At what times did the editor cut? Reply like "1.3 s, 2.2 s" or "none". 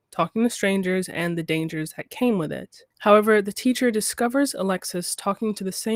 2.9 s